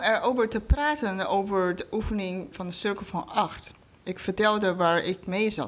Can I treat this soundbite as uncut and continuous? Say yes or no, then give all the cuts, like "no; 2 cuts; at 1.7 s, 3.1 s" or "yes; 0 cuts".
no; 1 cut; at 2.5 s